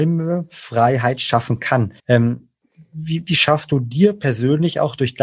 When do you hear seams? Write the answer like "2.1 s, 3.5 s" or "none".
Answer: 2.0 s